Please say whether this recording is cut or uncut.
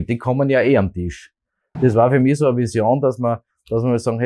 cut